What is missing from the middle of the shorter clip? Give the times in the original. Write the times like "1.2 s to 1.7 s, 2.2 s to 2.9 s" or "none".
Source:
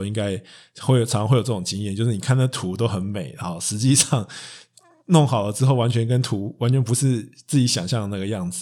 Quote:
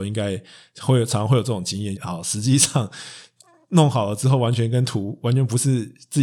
2.0 s to 3.3 s